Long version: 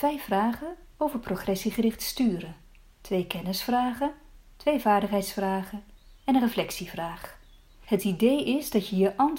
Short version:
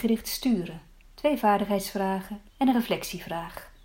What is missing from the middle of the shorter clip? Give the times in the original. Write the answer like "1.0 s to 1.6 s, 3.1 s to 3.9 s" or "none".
2.8 s to 4.4 s, 5.9 s to 6.2 s